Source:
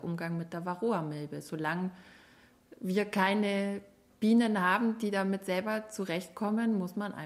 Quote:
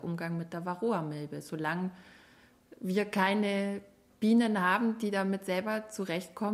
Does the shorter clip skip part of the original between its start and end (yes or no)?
no